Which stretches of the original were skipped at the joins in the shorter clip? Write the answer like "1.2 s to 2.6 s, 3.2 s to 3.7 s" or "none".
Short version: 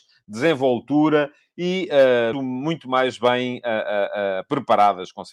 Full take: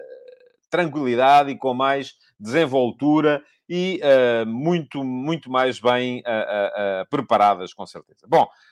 4.4 s to 4.9 s